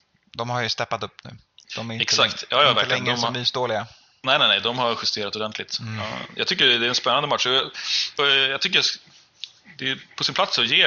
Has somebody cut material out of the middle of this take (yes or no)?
yes